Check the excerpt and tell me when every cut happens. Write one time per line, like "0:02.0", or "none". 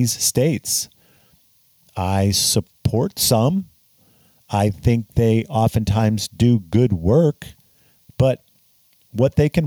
none